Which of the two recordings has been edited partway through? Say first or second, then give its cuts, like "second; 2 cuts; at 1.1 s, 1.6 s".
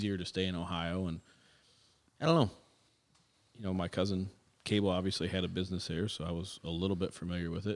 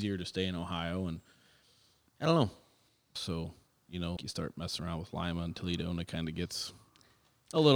second; 2 cuts; at 3.2 s, 4.2 s